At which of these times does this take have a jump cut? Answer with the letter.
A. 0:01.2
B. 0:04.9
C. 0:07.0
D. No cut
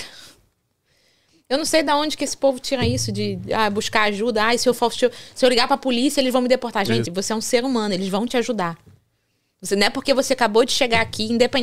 C